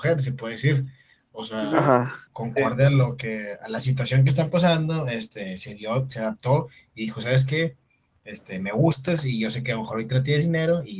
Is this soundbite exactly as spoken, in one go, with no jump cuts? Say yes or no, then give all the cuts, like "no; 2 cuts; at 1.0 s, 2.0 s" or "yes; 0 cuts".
yes; 0 cuts